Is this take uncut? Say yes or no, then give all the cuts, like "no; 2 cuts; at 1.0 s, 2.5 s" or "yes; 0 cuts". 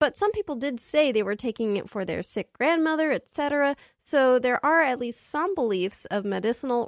yes; 0 cuts